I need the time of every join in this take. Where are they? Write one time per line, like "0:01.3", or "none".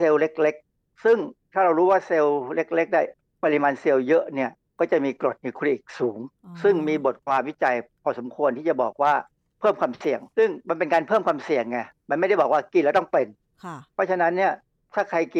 0:10.3